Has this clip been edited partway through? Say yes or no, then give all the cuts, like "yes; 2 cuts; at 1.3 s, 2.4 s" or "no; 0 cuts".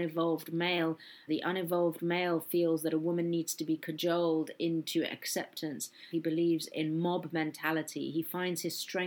yes; 2 cuts; at 1.3 s, 6.1 s